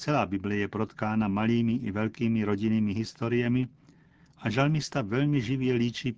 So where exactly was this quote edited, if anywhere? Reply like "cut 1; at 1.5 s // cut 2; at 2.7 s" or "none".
none